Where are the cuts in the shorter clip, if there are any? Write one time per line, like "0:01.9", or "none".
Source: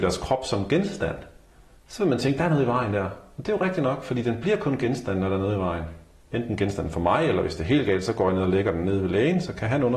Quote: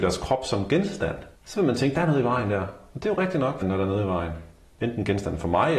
0:01.4
0:03.6